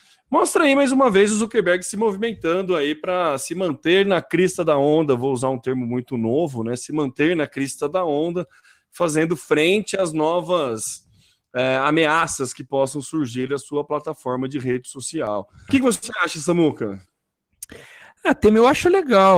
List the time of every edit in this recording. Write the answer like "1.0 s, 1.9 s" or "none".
15.7 s